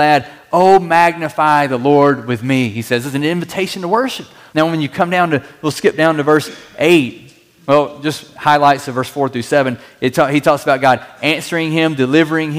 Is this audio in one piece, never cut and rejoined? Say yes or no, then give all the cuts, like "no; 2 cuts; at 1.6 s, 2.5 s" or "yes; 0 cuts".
no; 1 cut; at 4.5 s